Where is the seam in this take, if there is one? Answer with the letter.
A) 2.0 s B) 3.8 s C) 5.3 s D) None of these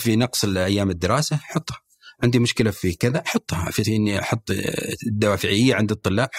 B